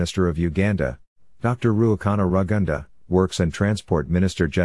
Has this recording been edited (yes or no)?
yes